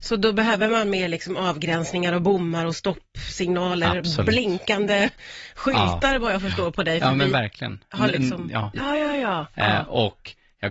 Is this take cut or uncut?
cut